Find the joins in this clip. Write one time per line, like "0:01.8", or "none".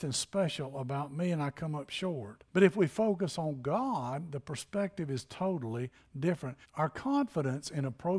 0:02.5
0:06.6